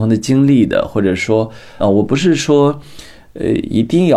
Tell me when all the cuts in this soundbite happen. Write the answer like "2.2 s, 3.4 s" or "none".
1.8 s